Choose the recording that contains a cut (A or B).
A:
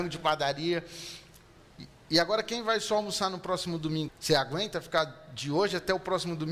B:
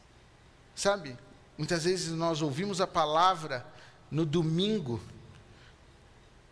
A